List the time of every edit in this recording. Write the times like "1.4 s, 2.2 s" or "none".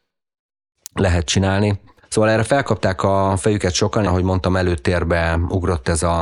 2.0 s, 4.1 s